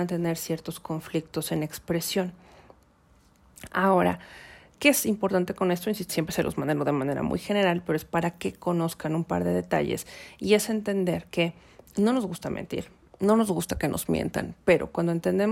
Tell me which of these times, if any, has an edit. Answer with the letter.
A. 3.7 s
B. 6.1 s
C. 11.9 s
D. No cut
B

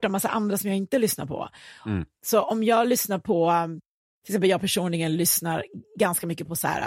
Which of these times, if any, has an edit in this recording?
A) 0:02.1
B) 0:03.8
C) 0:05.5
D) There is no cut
D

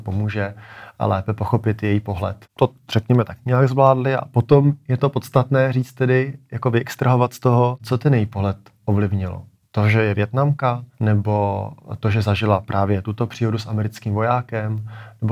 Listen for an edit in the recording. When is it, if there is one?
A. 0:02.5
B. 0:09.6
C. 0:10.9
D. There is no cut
C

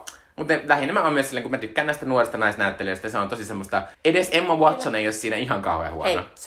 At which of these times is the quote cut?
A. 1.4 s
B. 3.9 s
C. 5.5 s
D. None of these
B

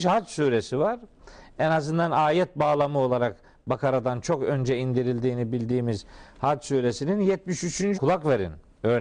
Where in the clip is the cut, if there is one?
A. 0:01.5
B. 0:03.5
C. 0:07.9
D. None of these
C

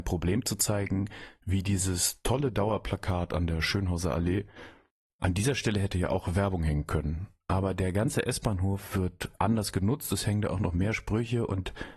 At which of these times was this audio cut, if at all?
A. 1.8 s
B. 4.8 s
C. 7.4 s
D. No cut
D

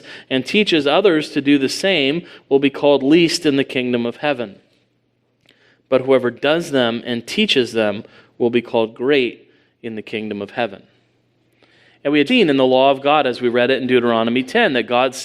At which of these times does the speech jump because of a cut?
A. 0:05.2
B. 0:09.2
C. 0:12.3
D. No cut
C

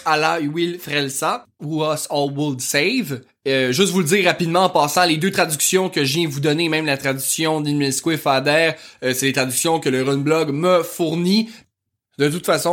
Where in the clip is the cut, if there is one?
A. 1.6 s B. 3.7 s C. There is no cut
A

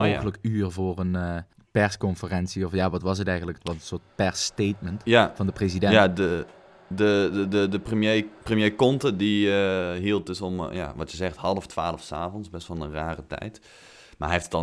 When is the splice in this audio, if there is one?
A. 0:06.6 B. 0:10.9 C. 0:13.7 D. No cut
D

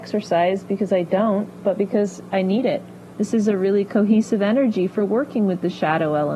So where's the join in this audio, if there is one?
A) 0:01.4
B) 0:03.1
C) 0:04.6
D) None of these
B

